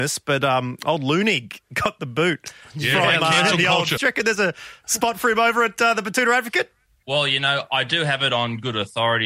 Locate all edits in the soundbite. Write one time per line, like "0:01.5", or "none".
0:04.0
0:07.0